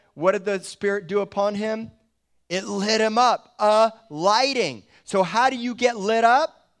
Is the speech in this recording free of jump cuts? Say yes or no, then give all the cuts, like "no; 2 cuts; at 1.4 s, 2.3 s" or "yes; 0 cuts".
yes; 0 cuts